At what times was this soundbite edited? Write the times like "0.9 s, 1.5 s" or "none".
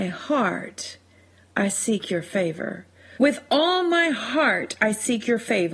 3.2 s